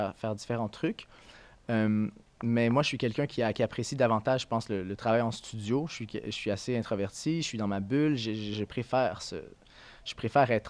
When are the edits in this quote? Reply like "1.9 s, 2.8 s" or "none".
none